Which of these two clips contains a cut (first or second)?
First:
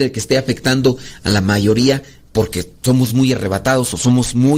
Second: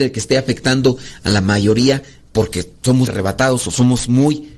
second